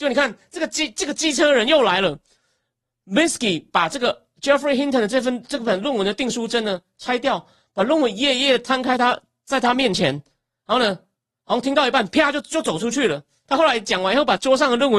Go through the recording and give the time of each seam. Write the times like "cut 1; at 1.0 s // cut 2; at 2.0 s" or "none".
cut 1; at 13.5 s